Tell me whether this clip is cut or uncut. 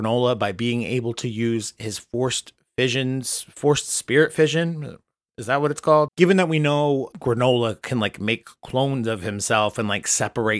cut